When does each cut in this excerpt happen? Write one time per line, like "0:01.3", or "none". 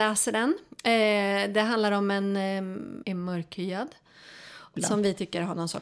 0:03.0
0:04.8